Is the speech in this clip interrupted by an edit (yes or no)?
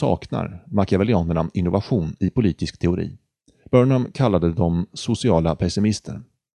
yes